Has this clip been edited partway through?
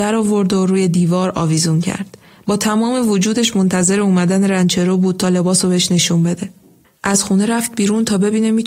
no; 0 cuts

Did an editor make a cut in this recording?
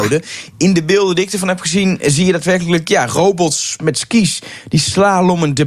no; 0 cuts

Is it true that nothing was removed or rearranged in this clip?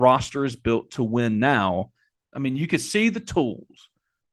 no; 1 cut; at 2.2 s

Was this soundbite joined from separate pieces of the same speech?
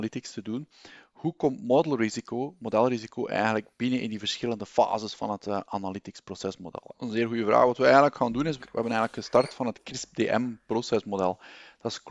yes; 2 cuts; at 6.9 s, 8.6 s

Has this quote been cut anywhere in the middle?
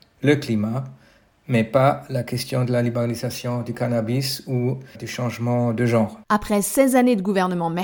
yes; 2 cuts; at 5.0 s, 6.2 s

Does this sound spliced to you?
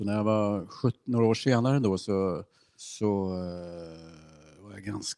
no; 0 cuts

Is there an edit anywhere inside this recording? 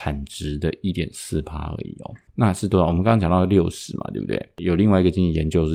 no; 0 cuts

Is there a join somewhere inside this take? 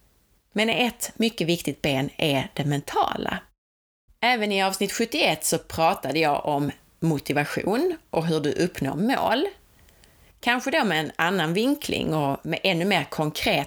yes; 1 cut; at 4.1 s

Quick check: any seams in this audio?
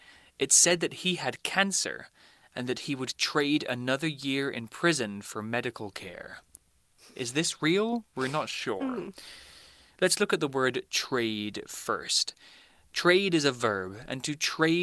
no; 0 cuts

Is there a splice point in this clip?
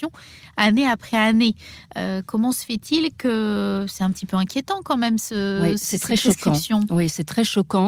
no; 0 cuts

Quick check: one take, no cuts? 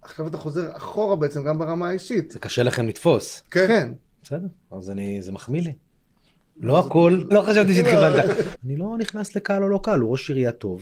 no; 2 cuts; at 7.3 s, 8.5 s

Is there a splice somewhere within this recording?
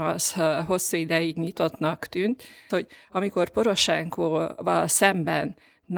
yes; 1 cut; at 2.7 s

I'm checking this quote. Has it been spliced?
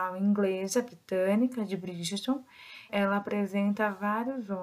yes; 1 cut; at 2.9 s

